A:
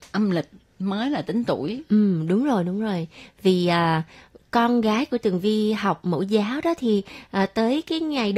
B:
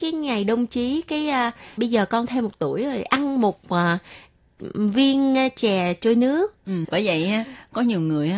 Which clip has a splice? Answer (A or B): B